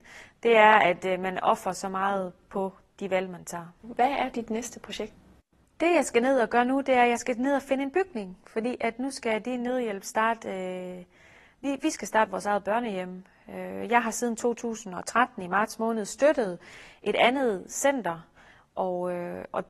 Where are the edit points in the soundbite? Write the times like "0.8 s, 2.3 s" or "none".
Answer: 3.8 s